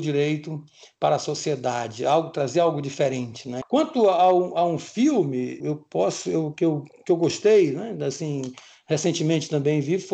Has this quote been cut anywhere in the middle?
yes; 2 cuts; at 3.6 s, 5.6 s

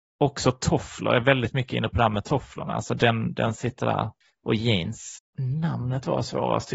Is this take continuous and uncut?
yes; 0 cuts

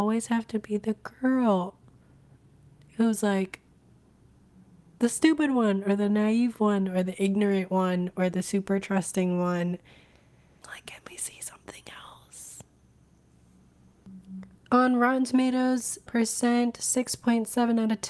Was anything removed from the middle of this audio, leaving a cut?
yes; 3 cuts; at 10.6 s, 14.5 s, 16.1 s

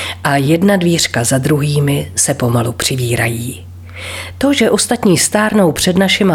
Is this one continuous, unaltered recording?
yes; 0 cuts

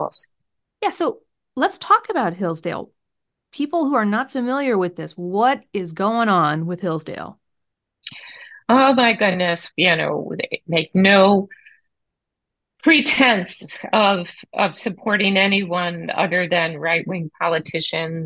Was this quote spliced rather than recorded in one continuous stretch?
yes; 1 cut; at 9.7 s

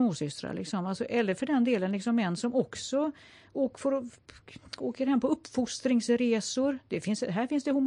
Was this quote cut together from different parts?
no; 0 cuts

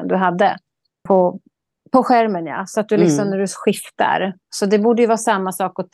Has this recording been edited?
yes; 1 cut; at 1.1 s

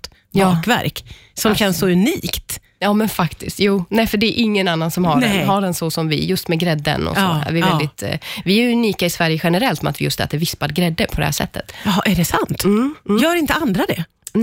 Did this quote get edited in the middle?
no; 0 cuts

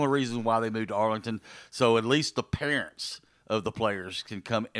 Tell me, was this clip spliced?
no; 0 cuts

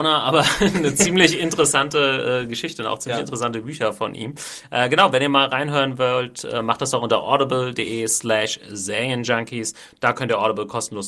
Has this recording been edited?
no; 0 cuts

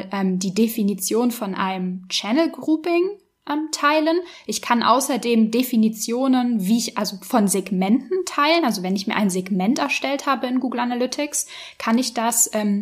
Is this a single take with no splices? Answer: yes; 0 cuts

